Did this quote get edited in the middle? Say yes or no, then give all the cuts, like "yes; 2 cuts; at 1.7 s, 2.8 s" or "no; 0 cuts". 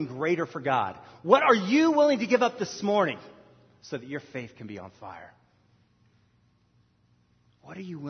no; 0 cuts